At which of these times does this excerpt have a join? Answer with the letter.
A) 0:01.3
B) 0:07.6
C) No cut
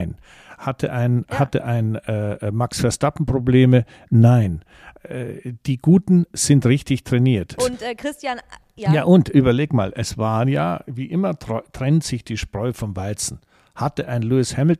B